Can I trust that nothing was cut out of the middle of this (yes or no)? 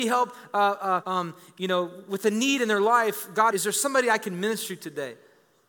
no